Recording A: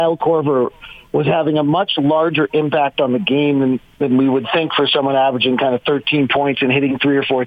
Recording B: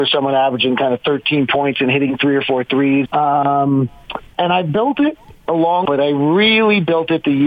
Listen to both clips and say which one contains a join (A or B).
B